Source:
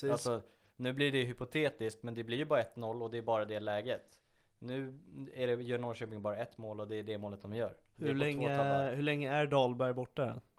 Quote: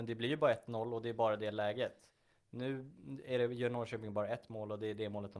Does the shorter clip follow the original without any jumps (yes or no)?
yes